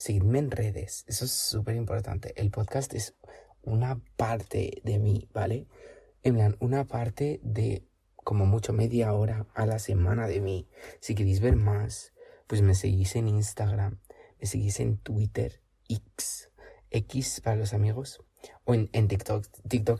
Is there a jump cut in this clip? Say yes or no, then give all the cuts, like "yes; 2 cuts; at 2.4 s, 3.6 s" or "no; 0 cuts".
no; 0 cuts